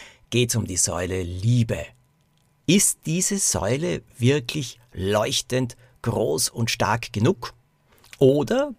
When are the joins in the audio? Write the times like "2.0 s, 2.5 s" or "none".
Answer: 2.6 s